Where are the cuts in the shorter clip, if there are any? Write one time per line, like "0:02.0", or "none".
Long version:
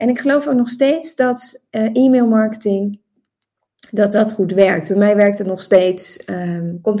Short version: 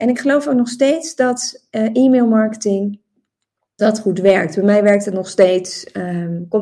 0:03.8